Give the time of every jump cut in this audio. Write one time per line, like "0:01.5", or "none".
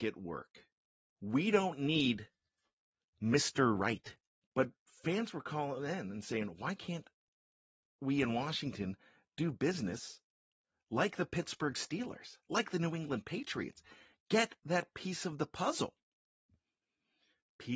0:01.1
0:04.4

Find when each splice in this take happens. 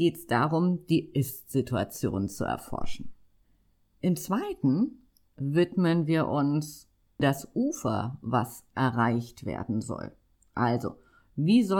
0:07.2

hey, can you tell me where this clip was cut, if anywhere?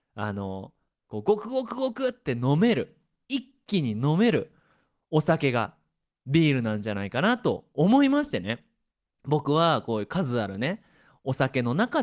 none

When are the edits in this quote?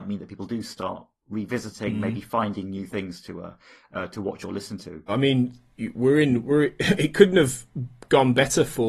0:05.1

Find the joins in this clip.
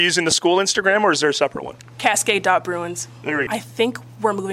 0:03.5

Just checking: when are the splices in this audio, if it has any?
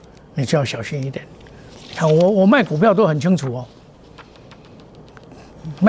none

